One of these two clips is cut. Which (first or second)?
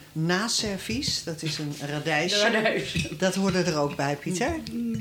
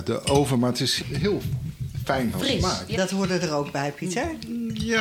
second